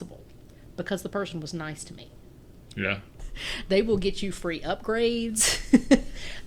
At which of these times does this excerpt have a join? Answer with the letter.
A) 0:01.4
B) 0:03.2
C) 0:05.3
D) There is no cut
B